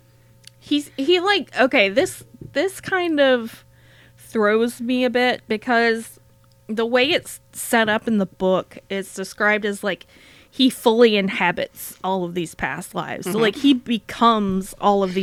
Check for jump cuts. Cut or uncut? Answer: uncut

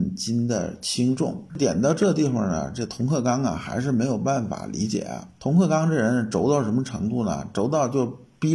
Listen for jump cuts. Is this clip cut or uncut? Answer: cut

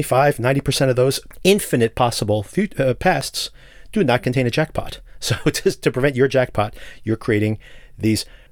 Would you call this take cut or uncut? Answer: uncut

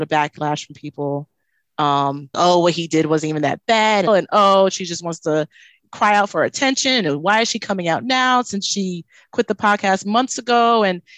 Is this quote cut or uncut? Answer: cut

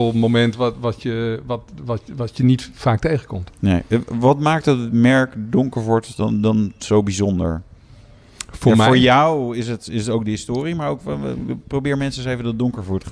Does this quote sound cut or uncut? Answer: uncut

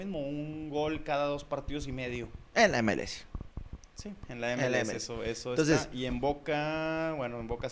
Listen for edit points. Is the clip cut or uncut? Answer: uncut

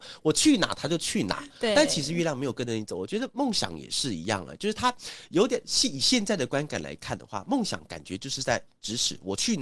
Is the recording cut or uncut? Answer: uncut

